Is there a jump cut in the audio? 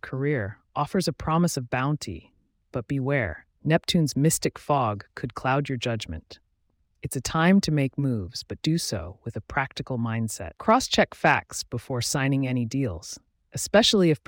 yes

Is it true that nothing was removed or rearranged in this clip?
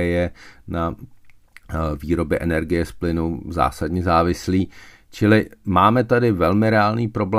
yes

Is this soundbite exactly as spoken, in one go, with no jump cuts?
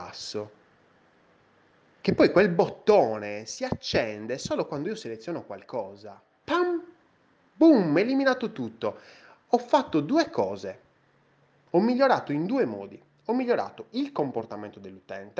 no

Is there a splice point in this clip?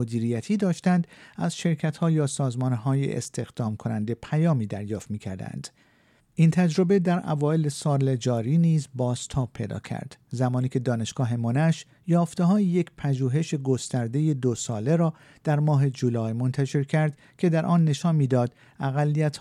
yes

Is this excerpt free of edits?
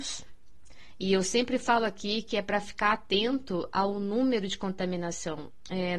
yes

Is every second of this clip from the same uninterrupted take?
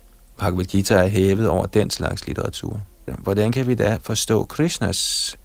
no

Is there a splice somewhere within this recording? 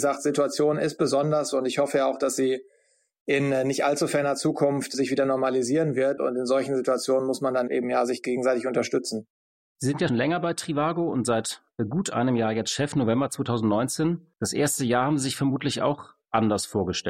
yes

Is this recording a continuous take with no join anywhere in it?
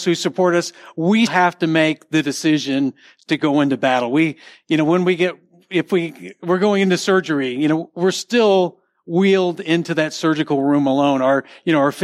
no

